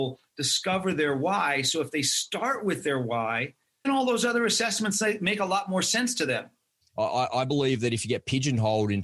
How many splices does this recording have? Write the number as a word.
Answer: two